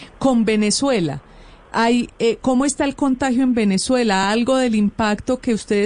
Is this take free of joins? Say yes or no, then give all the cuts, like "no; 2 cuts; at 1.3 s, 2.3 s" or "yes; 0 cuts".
yes; 0 cuts